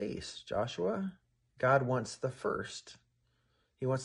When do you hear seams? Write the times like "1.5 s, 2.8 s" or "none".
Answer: 1.5 s